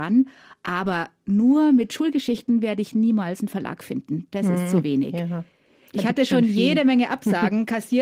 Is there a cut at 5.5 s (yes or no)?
no